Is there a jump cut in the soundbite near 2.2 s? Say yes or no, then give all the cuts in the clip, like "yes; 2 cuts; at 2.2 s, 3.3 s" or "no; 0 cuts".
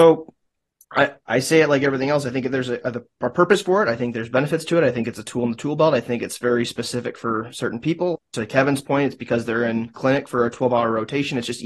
no; 1 cut; at 8.1 s